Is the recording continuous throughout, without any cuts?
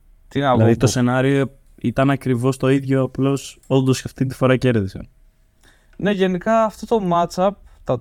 yes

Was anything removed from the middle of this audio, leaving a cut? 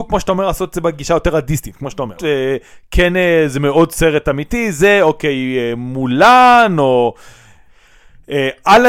yes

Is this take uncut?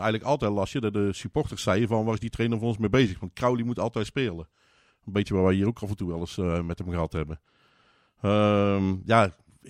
yes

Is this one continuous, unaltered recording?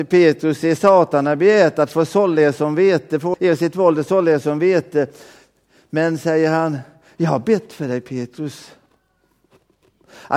no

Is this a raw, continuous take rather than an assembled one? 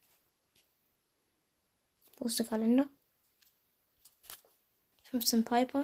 no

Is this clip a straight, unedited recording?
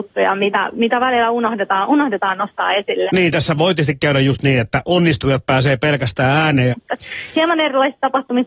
no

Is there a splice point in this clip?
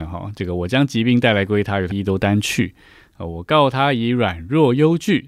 yes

